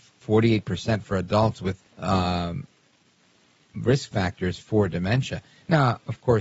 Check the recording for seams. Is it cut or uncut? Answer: cut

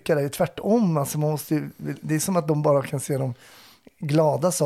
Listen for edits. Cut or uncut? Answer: uncut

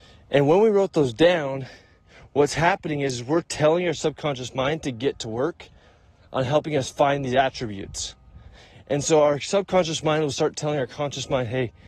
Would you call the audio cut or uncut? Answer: uncut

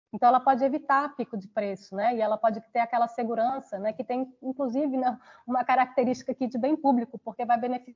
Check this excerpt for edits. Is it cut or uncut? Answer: uncut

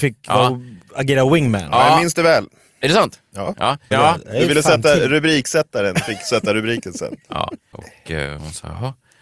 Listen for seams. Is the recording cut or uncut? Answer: cut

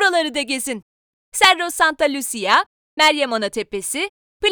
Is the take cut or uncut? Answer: uncut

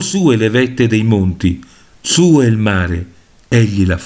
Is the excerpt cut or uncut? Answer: uncut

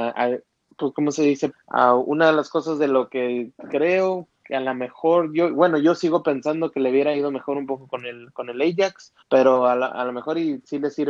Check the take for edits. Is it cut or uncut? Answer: cut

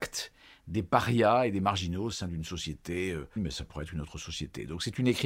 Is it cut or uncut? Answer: cut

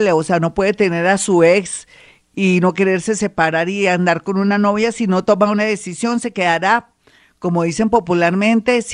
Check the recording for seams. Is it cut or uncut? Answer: uncut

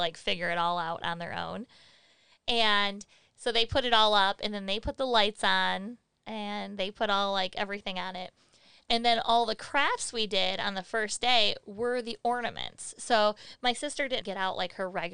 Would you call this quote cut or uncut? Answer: cut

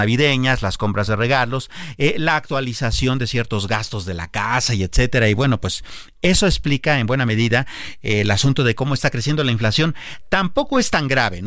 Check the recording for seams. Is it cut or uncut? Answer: uncut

